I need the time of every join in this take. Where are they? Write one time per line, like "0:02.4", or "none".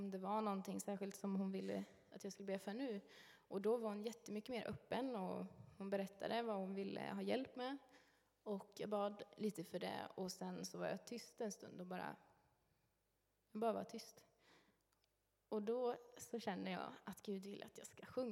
none

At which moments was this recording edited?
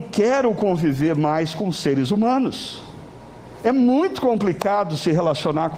none

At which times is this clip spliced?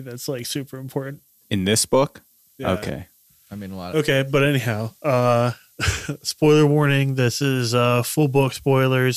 none

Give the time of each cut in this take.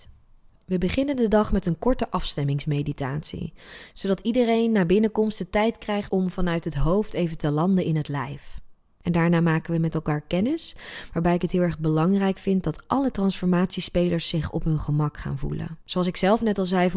0:15.8

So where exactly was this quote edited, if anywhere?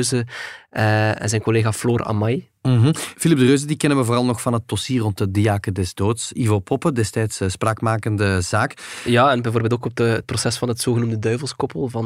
none

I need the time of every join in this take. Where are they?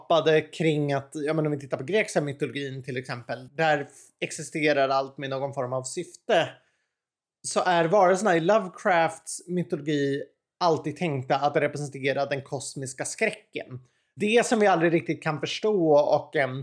0:03.5

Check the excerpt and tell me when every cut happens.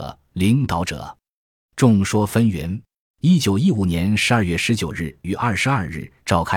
0:03.0
0:05.2

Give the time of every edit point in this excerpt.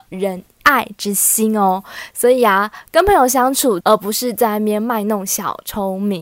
0:03.8

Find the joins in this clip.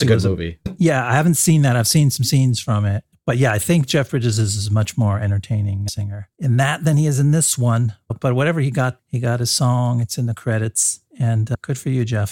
none

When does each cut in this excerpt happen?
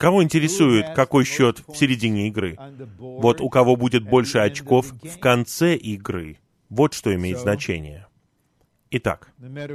none

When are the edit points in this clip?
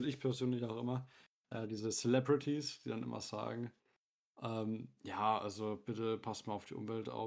none

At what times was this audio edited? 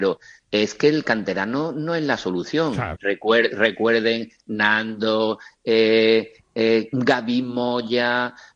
0:02.9
0:06.9

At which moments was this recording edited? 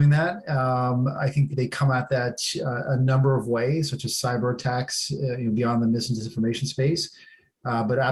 0:01.5

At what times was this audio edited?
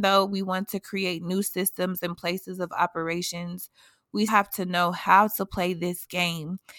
0:04.3

